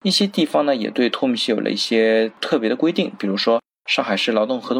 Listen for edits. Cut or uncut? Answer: uncut